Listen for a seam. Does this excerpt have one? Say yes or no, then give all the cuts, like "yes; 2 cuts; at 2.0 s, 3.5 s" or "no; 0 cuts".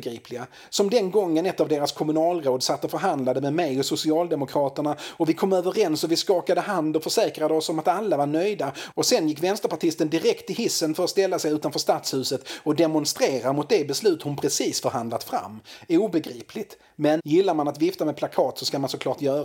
yes; 1 cut; at 17.2 s